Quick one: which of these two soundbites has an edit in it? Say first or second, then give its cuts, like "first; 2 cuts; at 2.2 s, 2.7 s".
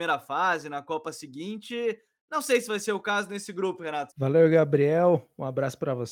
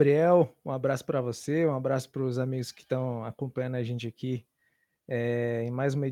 first; 1 cut; at 4.1 s